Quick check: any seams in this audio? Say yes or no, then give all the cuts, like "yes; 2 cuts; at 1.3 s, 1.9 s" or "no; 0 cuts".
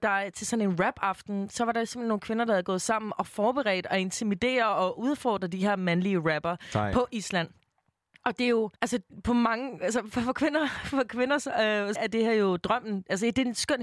yes; 3 cuts; at 8.8 s, 10.1 s, 12.0 s